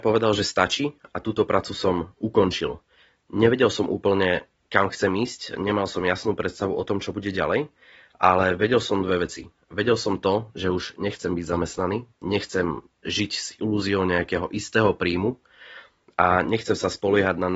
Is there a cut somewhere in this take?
no; 0 cuts

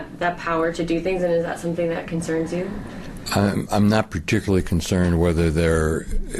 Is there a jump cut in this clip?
no; 0 cuts

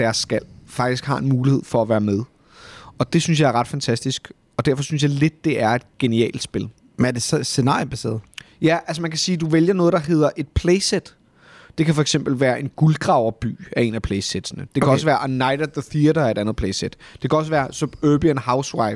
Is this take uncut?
yes; 0 cuts

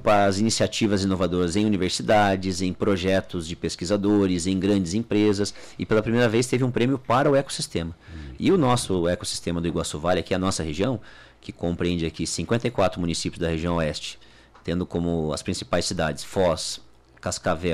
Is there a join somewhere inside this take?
no; 0 cuts

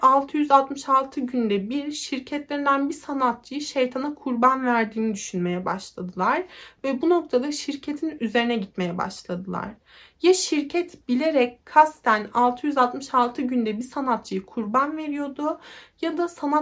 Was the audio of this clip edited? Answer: yes; 1 cut; at 13.8 s

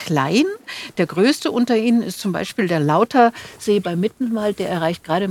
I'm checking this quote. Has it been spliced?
no; 0 cuts

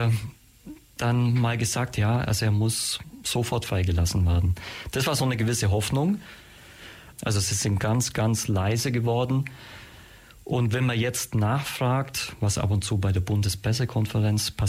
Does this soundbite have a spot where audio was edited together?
yes; 1 cut; at 7.1 s

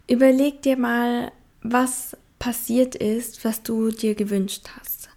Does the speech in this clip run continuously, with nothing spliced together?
yes; 0 cuts

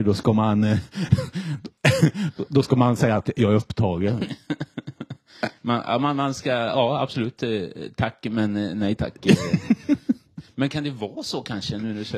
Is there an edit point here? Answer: no; 0 cuts

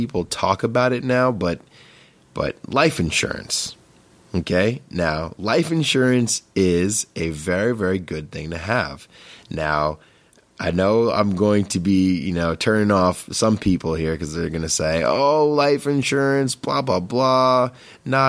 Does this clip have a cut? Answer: no; 0 cuts

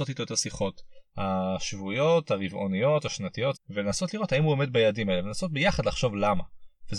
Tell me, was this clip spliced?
yes; 1 cut; at 3.5 s

